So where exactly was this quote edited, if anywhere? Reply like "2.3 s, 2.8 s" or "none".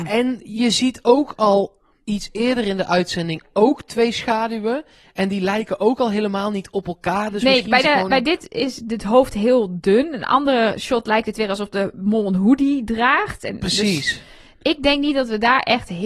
7.8 s